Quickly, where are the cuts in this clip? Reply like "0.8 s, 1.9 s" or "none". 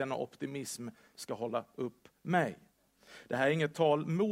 none

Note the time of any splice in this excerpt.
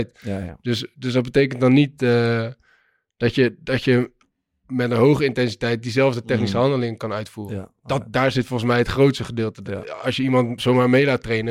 none

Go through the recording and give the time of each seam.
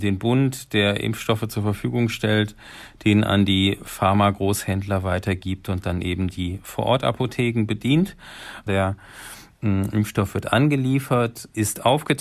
8.7 s

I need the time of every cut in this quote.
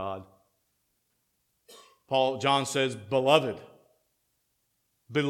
none

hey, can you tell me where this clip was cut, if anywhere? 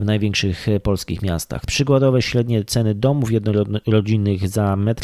1.7 s

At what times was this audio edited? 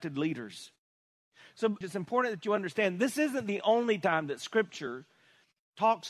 1.8 s

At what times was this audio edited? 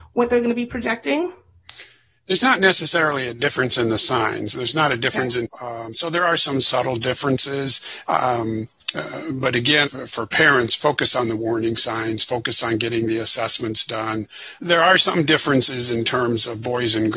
5.4 s, 9.9 s, 14.6 s

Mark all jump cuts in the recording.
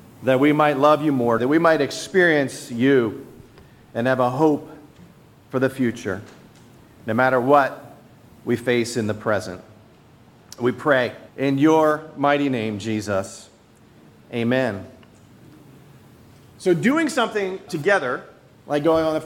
1.4 s, 11.3 s, 17.7 s

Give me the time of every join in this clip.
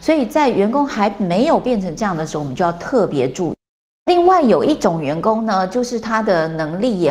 none

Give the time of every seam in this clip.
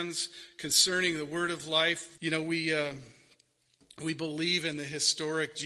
2.2 s

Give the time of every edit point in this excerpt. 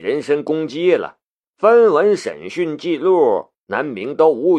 1.4 s

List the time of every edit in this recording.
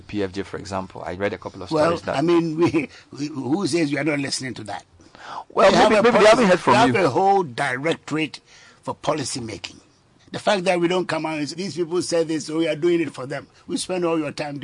2.0 s, 10.2 s, 11.5 s

